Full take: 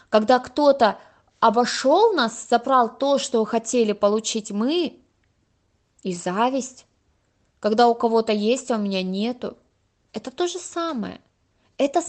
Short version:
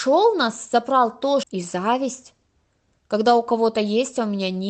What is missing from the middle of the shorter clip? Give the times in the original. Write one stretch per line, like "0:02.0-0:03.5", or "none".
0:03.2-0:05.9

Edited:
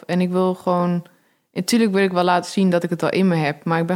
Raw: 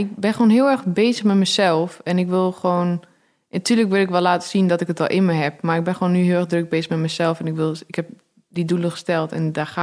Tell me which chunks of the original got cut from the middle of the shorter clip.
none

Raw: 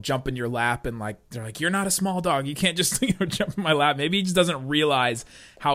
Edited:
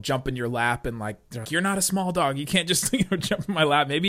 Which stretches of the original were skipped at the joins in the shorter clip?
0:01.4-0:01.5

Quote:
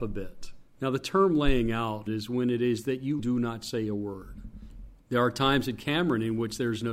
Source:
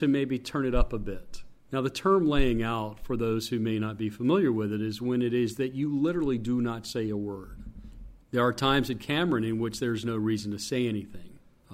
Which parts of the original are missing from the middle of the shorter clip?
0:03.0-0:04.8
0:05.9-0:06.4

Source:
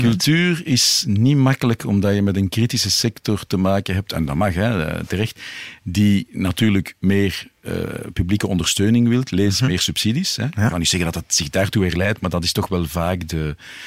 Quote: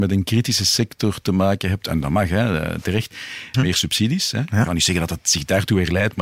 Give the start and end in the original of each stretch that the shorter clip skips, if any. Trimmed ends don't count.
0:05.8-0:09.6

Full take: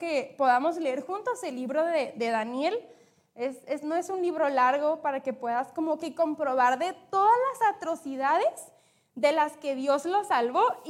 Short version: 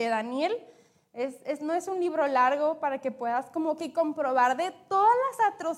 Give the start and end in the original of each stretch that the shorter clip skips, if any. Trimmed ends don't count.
none

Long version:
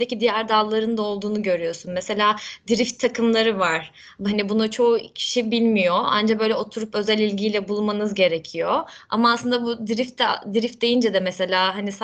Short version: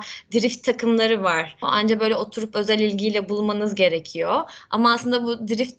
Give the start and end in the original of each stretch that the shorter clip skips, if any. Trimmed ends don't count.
0:04.0-0:06.0

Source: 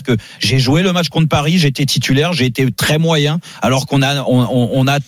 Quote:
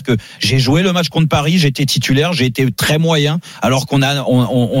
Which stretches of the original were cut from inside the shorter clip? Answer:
none

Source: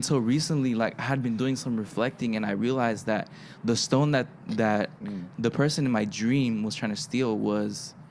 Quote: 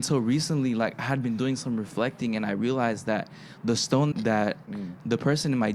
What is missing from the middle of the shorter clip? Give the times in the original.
0:04.1-0:04.4

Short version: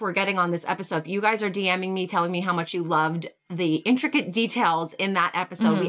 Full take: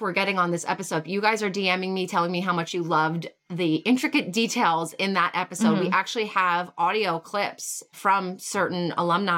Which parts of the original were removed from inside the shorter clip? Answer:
none

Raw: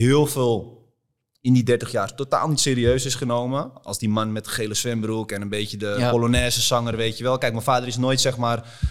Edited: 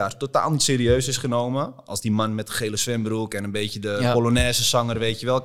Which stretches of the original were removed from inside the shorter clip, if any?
none

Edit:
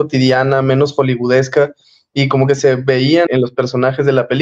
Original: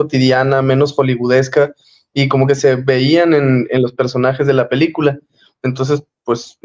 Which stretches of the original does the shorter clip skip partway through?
0:03.3-0:03.7

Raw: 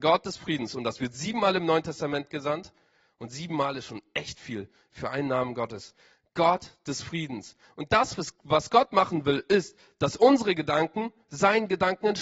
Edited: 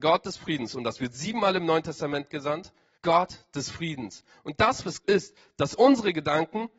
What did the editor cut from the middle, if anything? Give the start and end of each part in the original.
0:03.0-0:06.3
0:08.4-0:09.5

